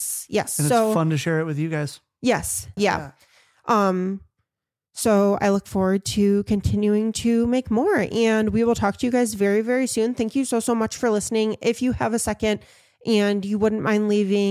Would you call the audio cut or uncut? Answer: cut